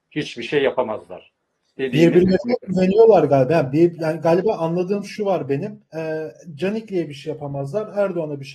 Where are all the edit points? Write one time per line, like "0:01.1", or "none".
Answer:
0:05.9